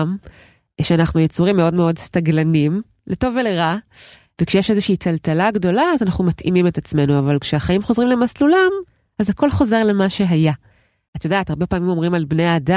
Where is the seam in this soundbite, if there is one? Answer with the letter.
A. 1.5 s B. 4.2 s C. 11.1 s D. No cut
C